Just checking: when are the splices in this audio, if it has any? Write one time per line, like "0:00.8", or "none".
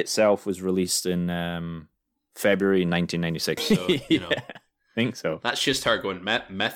0:03.6